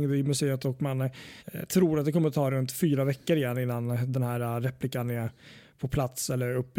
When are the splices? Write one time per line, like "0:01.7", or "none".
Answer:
0:01.4